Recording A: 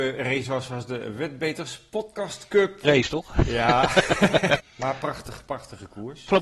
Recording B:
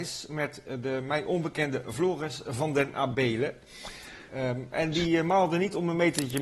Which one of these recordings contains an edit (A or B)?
A